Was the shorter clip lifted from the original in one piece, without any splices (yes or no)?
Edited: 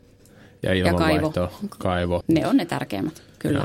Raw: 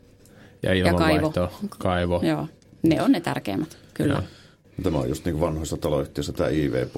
no